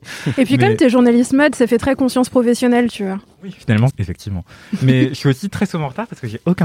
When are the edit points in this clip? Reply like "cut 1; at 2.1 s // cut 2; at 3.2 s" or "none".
cut 1; at 3.9 s